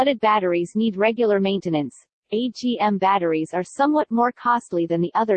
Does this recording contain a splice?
no; 0 cuts

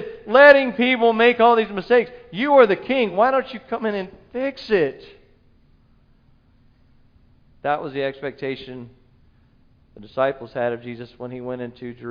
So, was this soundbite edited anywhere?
no; 0 cuts

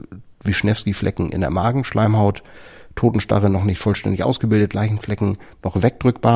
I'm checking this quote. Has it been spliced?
no; 0 cuts

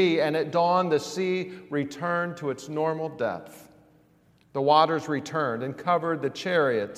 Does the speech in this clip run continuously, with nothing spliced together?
no; 1 cut; at 4.4 s

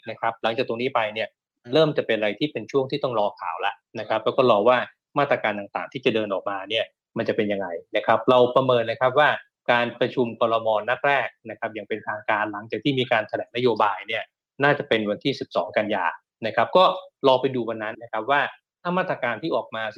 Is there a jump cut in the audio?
yes; 1 cut; at 17.9 s

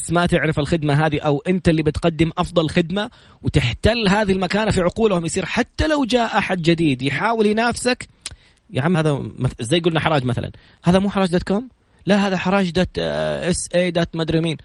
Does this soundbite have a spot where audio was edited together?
yes; 1 cut; at 8.9 s

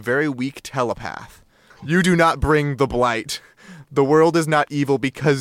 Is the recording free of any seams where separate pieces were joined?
no; 1 cut; at 1.7 s

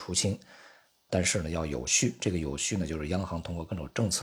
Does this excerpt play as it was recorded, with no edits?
no; 1 cut; at 1.1 s

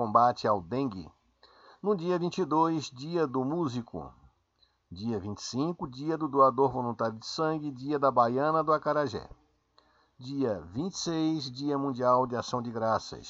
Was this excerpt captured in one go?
yes; 0 cuts

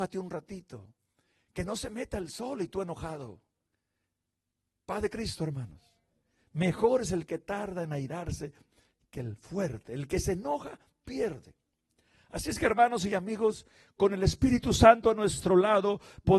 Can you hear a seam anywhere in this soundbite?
no; 0 cuts

